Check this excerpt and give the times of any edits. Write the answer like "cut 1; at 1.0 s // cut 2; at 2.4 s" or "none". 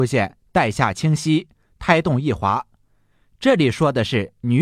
none